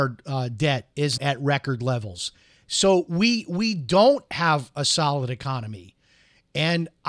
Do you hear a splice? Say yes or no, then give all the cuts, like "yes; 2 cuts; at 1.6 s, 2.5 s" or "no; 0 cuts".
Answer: yes; 1 cut; at 1.2 s